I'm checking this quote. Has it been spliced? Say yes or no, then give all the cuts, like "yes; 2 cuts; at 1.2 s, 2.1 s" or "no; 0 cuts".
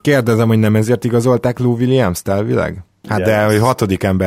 yes; 1 cut; at 3.0 s